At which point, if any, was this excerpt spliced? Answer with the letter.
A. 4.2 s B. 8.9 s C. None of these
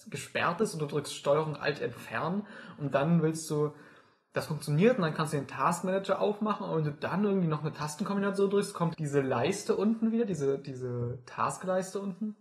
B